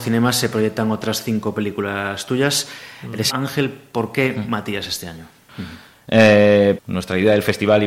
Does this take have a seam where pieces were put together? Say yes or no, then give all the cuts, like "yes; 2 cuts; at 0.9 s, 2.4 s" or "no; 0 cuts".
yes; 3 cuts; at 3.3 s, 5.5 s, 6.8 s